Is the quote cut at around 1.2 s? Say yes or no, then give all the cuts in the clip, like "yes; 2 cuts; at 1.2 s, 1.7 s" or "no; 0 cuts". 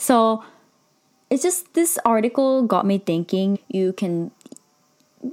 no; 1 cut; at 3.5 s